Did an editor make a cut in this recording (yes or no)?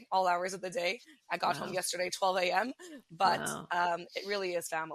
no